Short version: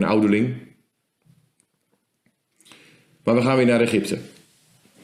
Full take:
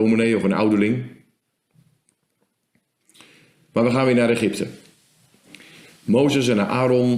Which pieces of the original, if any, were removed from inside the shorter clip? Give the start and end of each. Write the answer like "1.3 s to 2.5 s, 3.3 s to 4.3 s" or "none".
none

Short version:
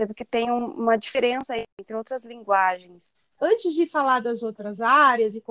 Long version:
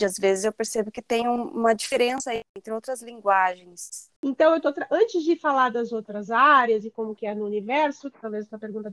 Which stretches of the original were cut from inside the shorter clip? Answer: 4.1 s to 4.9 s

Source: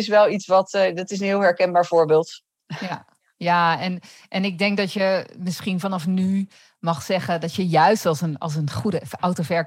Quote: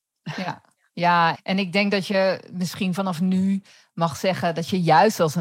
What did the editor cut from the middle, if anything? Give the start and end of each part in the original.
3.8 s to 4.2 s

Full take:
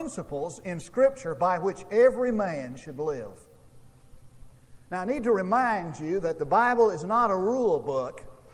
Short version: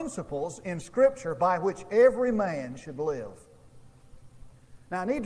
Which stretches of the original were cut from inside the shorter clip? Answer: none

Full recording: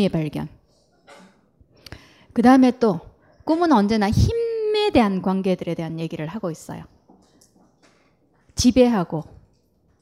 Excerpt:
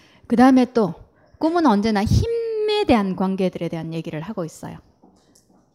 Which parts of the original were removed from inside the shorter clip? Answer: none

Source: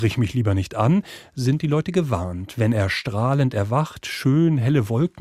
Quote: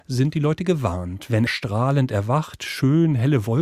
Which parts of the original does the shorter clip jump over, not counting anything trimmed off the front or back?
2.7 s to 2.9 s

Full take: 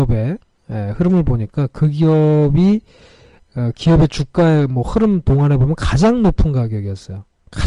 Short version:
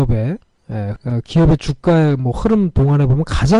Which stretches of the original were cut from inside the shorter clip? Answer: 1.0 s to 3.5 s

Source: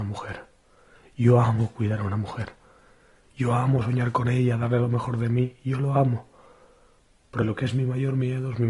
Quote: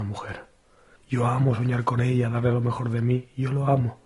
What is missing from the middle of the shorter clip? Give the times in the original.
1.0 s to 3.2 s

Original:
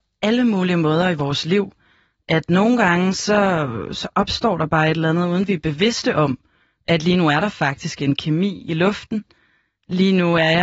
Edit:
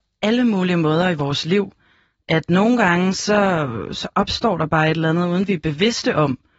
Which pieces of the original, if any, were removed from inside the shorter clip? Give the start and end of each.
none

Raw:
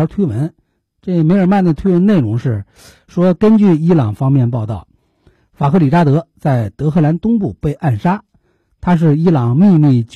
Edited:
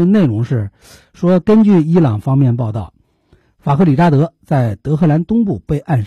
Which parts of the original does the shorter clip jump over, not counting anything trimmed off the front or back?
none

